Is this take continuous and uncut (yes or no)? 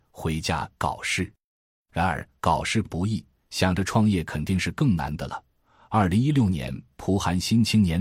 yes